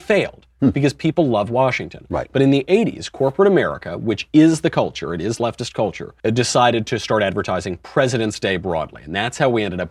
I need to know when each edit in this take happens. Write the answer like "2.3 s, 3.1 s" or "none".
6.2 s